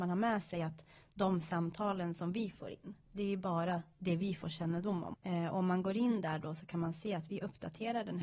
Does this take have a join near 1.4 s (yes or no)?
no